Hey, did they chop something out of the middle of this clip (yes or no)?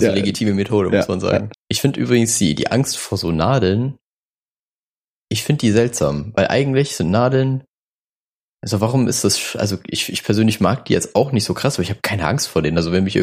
yes